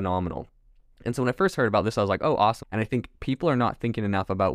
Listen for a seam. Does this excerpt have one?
yes; 1 cut; at 2.6 s

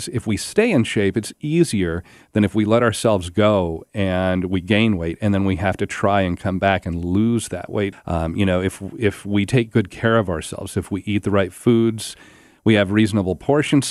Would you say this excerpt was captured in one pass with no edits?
no; 1 cut; at 7.9 s

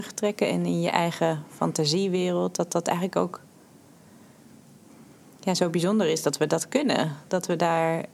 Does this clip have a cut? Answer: no; 0 cuts

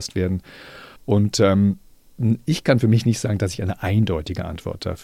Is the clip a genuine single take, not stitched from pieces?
no; 1 cut; at 1.0 s

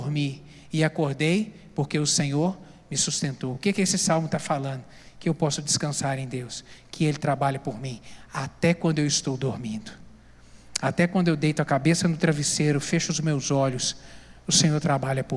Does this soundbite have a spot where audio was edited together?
no; 0 cuts

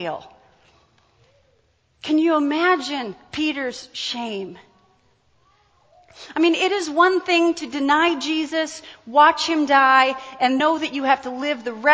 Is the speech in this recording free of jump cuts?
no; 1 cut; at 10.6 s

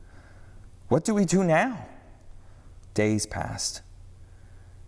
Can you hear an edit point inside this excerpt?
yes; 1 cut; at 2.9 s

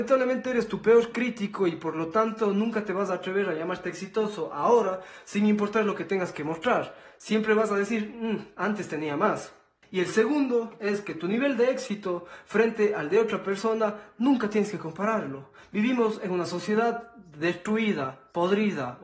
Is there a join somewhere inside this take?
yes; 1 cut; at 9.8 s

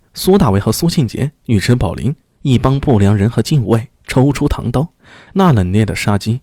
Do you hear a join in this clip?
yes; 1 cut; at 5.3 s

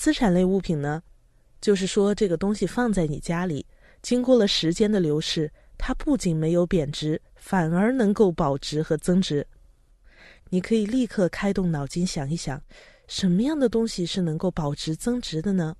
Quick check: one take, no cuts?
yes; 0 cuts

